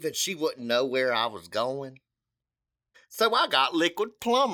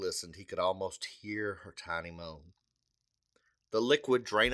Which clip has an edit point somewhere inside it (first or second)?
first